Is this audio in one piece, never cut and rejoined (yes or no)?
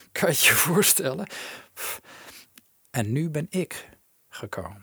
no